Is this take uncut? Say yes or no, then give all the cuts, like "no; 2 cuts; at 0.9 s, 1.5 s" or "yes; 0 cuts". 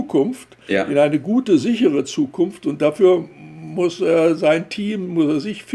yes; 0 cuts